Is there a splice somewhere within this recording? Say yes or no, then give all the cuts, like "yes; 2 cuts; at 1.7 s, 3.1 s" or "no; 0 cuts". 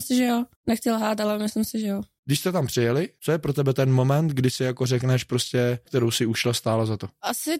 yes; 1 cut; at 5.9 s